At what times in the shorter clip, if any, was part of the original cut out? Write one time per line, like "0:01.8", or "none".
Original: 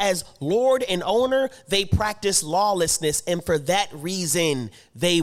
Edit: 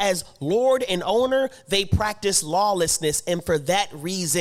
none

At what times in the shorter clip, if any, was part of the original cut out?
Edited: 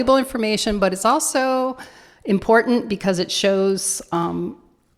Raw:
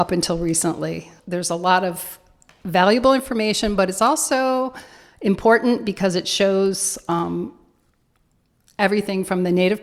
none

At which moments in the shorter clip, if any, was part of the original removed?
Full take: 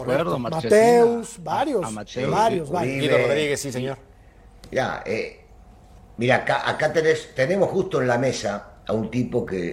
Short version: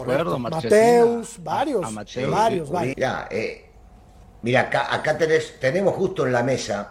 0:02.9

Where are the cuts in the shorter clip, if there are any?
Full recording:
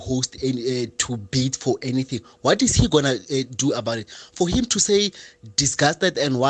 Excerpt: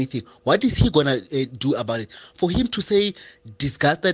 none

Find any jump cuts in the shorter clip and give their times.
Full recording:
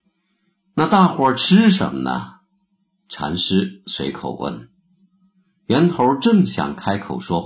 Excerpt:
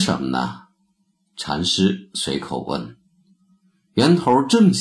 none

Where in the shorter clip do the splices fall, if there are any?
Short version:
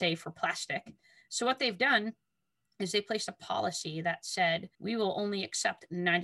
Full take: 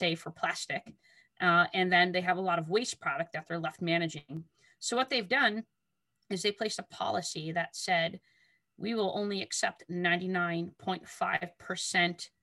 0:01.3
0:04.7

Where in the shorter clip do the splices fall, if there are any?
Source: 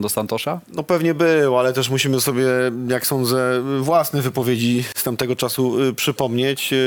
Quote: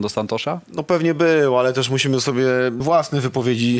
0:02.8

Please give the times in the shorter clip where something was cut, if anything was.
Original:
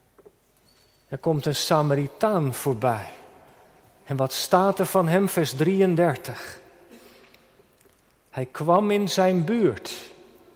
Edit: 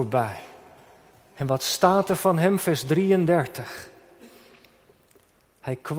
none

